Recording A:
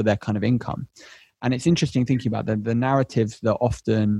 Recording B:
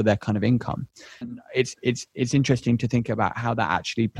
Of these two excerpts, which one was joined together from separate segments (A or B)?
B